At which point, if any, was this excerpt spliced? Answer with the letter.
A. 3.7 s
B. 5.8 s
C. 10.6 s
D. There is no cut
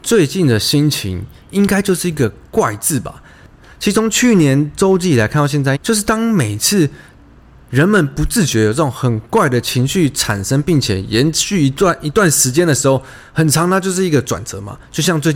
B